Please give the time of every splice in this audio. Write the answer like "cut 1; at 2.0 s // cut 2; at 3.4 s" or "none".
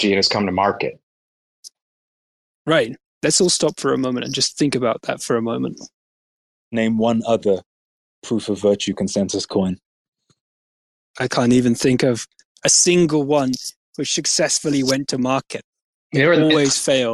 cut 1; at 3.1 s // cut 2; at 6.6 s